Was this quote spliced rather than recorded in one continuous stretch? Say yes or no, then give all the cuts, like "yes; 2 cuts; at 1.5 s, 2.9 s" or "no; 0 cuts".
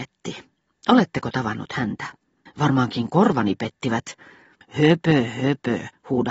yes; 2 cuts; at 2.5 s, 4.6 s